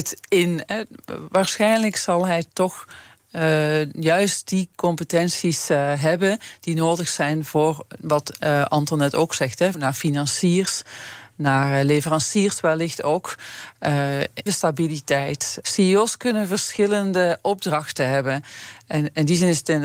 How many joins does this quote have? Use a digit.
3